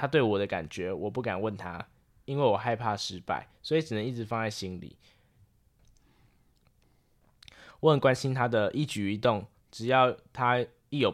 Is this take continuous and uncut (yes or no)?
no